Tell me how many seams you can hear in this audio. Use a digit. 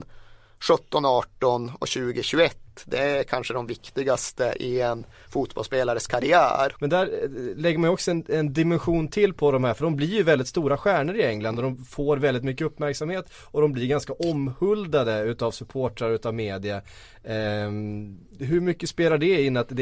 1